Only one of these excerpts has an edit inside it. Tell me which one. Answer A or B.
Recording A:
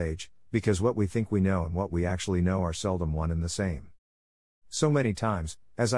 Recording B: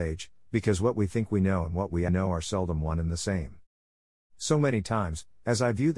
B